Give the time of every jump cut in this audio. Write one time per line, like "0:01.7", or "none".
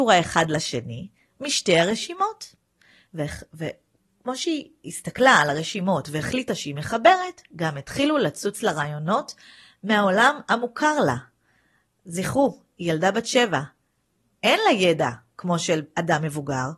0:03.1